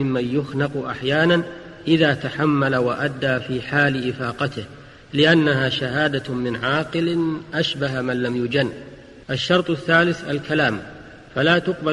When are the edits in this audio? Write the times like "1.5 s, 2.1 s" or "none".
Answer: 9.2 s